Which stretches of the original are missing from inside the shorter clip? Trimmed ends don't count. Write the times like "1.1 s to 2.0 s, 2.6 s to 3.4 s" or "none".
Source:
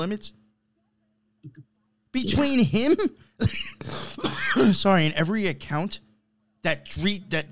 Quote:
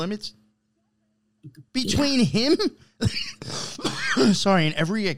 1.7 s to 2.1 s